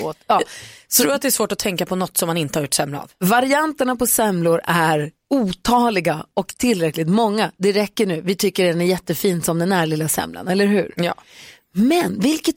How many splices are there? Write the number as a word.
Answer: one